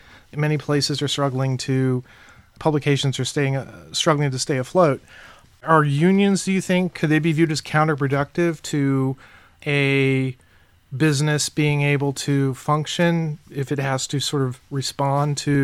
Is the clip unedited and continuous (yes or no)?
yes